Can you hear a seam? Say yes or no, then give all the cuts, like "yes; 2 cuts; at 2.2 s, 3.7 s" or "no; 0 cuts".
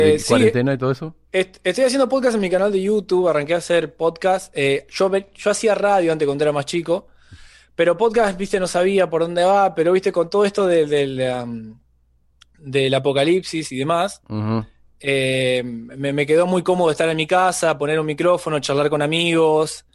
no; 0 cuts